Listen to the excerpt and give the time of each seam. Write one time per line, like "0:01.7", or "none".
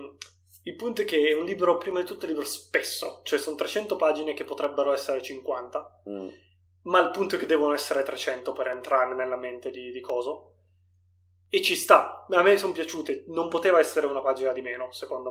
none